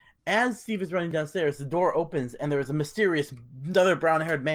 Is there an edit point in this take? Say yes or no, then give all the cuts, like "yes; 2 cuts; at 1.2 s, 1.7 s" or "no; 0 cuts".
no; 0 cuts